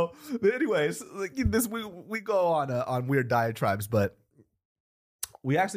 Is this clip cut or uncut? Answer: uncut